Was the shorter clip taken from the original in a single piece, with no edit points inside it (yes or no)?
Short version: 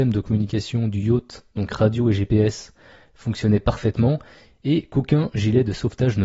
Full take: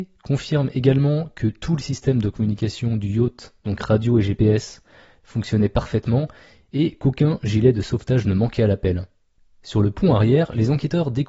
yes